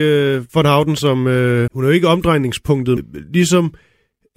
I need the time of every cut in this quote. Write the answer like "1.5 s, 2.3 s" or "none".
1.7 s, 3.0 s